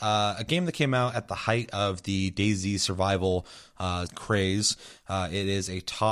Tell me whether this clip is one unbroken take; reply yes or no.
no